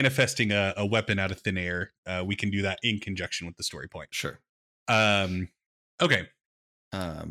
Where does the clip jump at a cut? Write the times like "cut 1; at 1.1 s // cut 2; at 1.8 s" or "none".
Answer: none